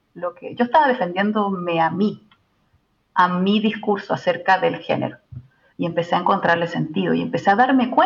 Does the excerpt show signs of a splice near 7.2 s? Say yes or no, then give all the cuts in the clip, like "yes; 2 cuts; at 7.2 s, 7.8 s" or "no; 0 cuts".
no; 1 cut; at 5.7 s